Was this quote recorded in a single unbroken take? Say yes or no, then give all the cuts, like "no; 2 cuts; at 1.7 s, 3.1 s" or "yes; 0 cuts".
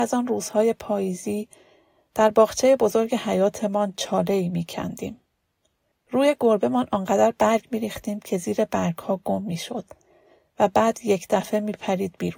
no; 1 cut; at 5.9 s